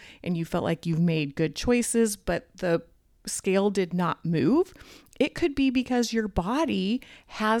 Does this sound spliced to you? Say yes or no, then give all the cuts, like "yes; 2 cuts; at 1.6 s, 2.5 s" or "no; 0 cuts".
no; 0 cuts